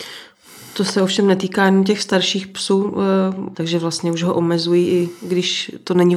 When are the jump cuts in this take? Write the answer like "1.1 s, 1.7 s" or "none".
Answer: 3.5 s